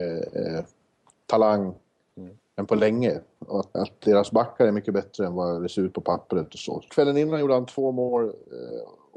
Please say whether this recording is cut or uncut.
cut